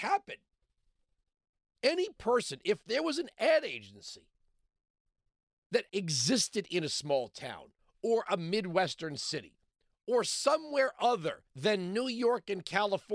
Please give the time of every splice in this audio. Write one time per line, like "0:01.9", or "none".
0:05.9
0:11.5